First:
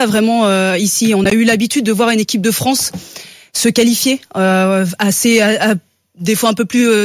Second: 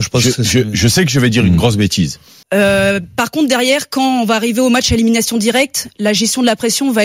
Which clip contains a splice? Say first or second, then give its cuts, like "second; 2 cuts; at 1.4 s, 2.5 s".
second; 1 cut; at 2.4 s